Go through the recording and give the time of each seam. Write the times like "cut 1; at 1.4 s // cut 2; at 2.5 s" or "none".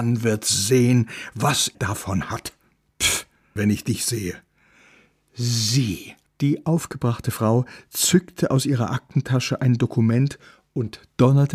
cut 1; at 1.7 s // cut 2; at 3.6 s // cut 3; at 6.3 s